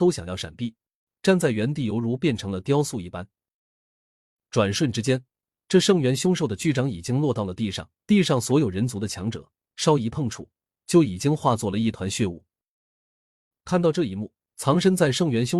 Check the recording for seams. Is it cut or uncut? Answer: cut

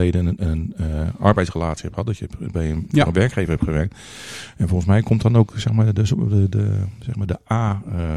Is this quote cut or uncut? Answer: uncut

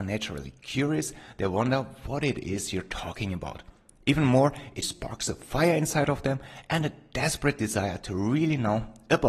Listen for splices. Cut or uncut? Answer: cut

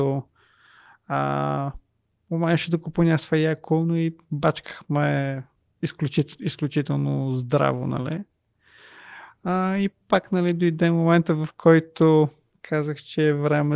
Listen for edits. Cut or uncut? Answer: uncut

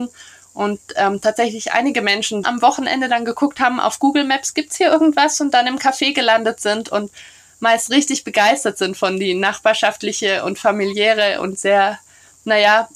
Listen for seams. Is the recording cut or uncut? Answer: cut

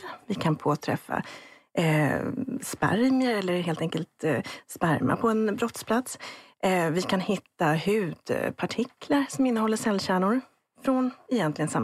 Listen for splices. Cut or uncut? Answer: uncut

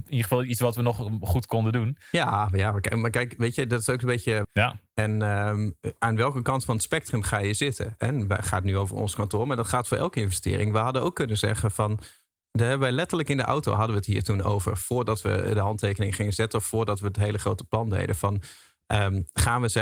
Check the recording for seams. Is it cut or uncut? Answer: cut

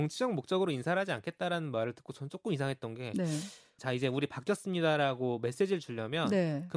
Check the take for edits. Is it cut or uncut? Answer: cut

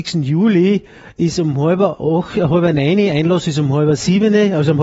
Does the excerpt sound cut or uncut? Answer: uncut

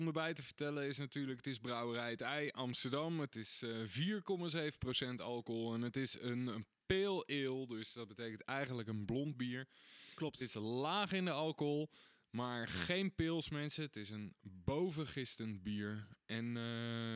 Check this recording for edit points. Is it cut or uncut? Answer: uncut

